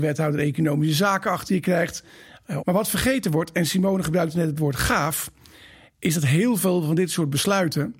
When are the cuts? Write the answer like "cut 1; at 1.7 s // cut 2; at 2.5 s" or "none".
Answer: cut 1; at 2.6 s